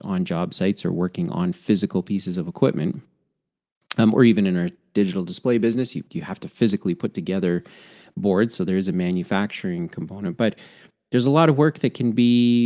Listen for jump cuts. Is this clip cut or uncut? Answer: uncut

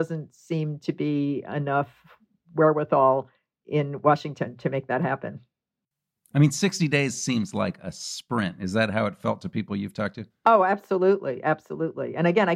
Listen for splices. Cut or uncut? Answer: uncut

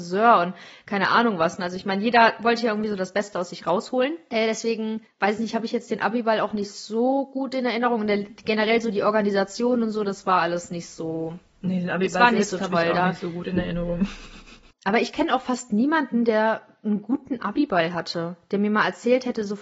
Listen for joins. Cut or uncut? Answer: uncut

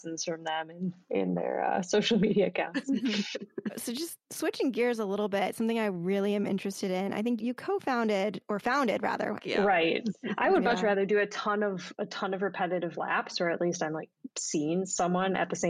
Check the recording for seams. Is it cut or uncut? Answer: cut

